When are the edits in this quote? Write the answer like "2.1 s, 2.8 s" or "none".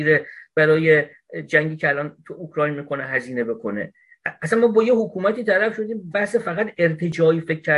6.1 s